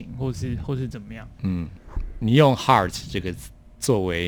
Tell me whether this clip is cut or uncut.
uncut